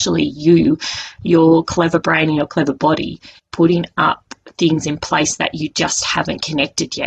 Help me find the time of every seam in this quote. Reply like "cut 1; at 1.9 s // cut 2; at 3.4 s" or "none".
cut 1; at 3.4 s